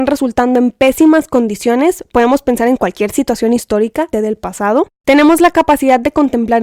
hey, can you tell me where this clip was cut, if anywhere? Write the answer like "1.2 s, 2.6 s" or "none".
4.1 s